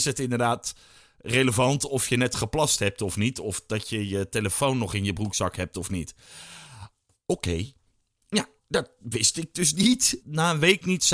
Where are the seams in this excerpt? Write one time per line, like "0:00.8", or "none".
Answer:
0:08.6
0:10.2